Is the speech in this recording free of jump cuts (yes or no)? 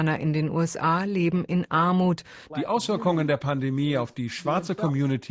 no